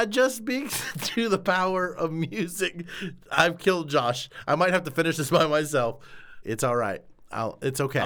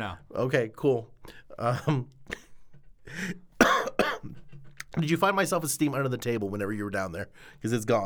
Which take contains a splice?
first; 1 cut; at 6.4 s

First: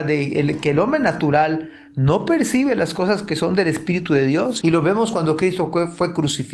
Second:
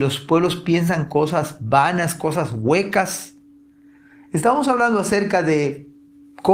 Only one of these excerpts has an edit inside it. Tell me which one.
first; 1 cut; at 4.6 s

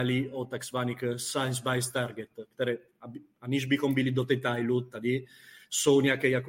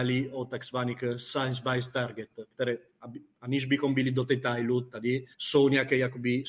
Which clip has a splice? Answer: second; 1 cut; at 5.3 s

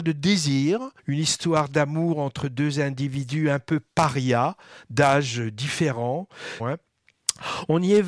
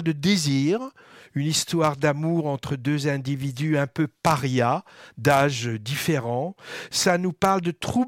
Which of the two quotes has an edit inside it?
first; 2 cuts; at 1.0 s, 6.6 s

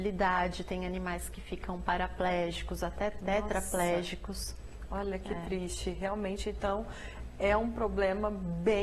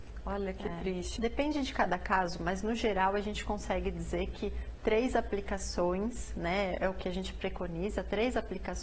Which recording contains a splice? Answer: second; 1 cut; at 1.2 s

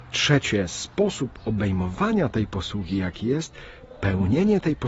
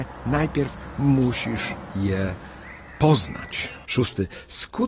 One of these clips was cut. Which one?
second; 1 cut; at 3.8 s

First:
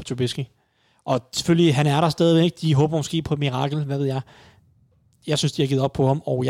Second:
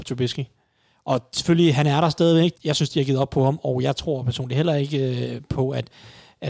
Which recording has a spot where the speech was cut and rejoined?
second; 1 cut; at 2.5 s

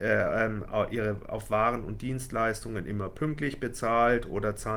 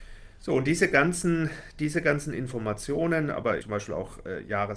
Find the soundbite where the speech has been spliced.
second; 1 cut; at 3.6 s

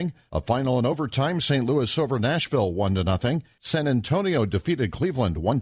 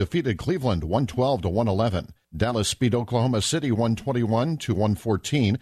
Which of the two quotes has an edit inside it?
first; 1 cut; at 3.6 s

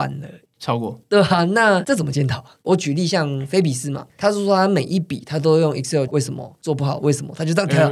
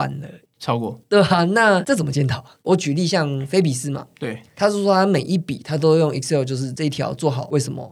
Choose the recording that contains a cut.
first; 2 cuts; at 4.1 s, 6.1 s

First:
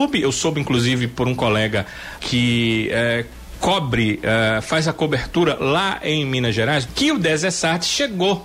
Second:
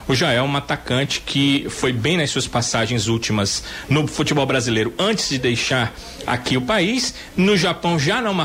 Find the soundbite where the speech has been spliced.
first; 2 cuts; at 2.2 s, 6.9 s

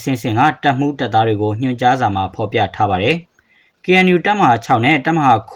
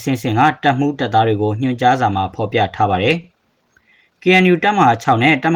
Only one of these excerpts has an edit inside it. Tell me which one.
first; 1 cut; at 3.2 s

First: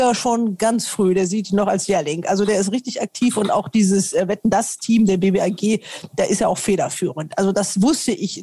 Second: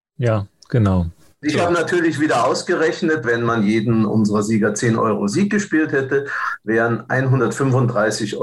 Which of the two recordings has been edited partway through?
second; 1 cut; at 3.2 s

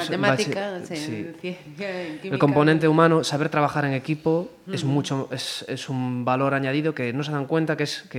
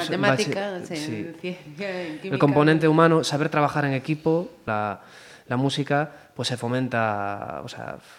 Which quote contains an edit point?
second; 1 cut; at 4.7 s

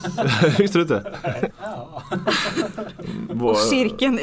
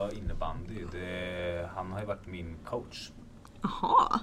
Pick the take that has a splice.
first; 1 cut; at 1.5 s

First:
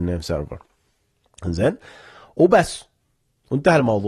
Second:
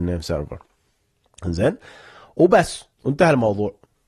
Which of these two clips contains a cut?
second; 1 cut; at 2.9 s

